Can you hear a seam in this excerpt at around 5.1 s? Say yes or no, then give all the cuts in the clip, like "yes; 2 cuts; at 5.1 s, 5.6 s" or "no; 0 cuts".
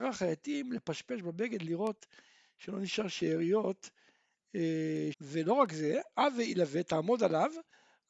yes; 1 cut; at 5.1 s